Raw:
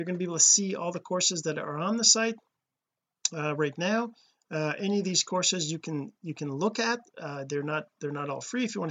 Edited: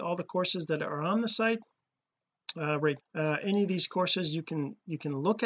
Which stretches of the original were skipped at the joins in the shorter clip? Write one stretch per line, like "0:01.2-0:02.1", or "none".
0:03.8-0:04.4

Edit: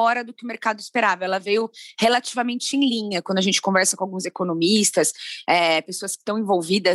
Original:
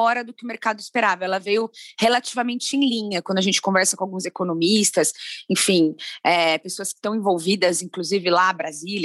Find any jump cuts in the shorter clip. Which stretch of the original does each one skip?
0:05.4-0:06.2

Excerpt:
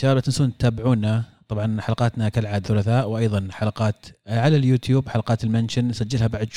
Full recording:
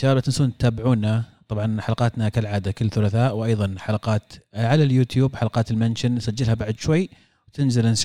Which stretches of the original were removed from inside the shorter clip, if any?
0:02.6-0:02.9

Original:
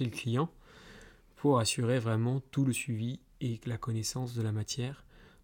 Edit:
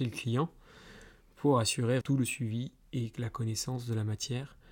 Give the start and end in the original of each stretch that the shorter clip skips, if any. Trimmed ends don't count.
0:02.0-0:02.5

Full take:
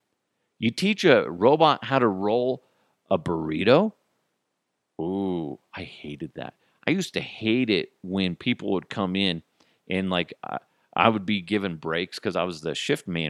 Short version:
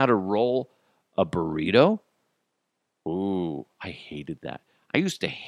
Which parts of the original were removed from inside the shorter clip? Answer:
none

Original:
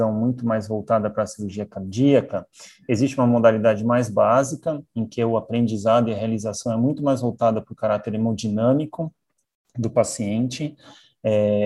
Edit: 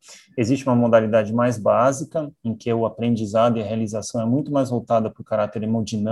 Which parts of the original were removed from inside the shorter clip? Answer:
none

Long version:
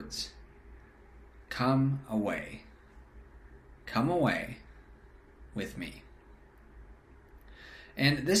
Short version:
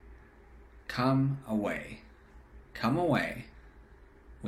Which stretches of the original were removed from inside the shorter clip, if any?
0:03.2-0:03.7

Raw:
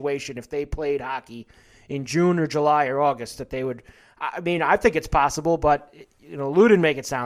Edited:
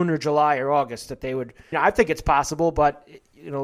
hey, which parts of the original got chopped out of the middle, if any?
0:04.0-0:04.6

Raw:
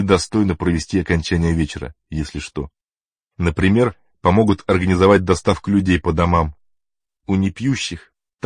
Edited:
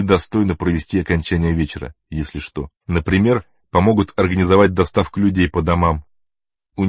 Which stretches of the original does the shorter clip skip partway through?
0:02.8-0:03.3

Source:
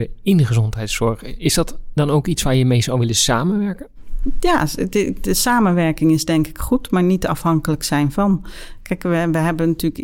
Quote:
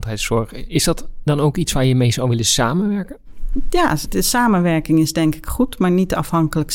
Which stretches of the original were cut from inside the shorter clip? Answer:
0:04.8-0:05.2

